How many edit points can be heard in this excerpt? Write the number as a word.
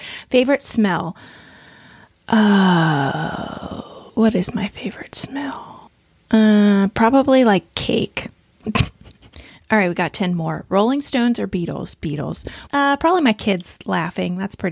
two